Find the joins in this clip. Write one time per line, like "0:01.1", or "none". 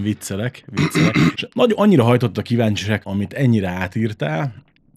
0:01.3
0:03.0